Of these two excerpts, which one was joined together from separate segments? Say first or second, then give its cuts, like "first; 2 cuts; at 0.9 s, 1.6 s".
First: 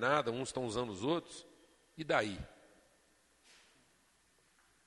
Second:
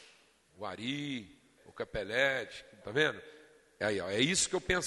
second; 2 cuts; at 1.6 s, 2.8 s